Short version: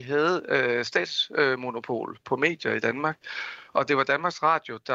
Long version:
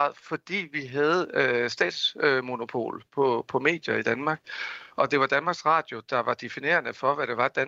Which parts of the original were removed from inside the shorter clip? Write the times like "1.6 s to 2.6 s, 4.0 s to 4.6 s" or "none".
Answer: 3.1 s to 3.5 s